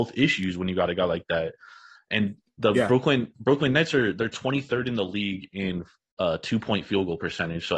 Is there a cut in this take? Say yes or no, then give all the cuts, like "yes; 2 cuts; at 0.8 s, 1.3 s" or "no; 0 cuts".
yes; 1 cut; at 2.0 s